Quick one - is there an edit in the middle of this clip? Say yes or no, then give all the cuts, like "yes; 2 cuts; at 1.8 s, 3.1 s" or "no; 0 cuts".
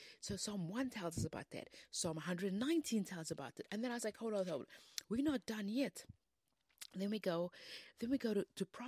no; 0 cuts